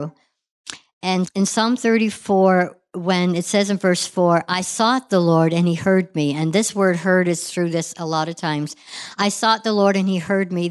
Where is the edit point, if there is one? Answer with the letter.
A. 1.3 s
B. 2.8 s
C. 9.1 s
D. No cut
A